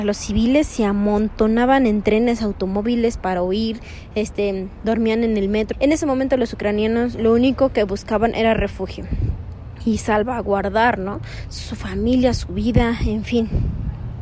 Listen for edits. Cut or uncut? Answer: cut